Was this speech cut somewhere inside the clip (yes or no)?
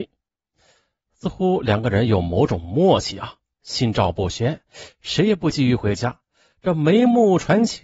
no